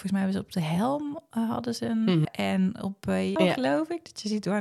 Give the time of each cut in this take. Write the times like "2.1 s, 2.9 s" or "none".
2.3 s, 3.4 s